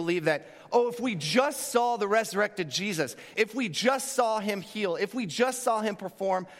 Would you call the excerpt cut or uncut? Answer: cut